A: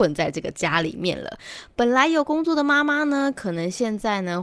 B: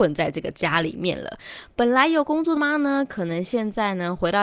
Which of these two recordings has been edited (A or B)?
B